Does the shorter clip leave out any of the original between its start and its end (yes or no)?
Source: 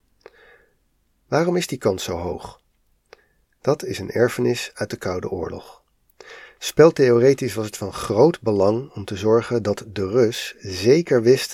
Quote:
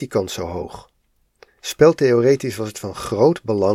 yes